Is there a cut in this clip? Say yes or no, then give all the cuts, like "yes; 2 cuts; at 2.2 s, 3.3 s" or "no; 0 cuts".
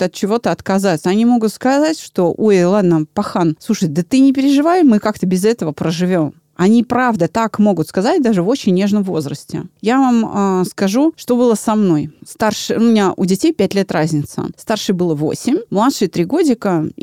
no; 0 cuts